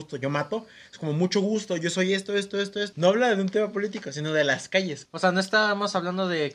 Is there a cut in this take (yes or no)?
yes